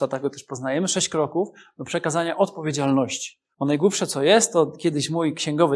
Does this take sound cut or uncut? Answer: cut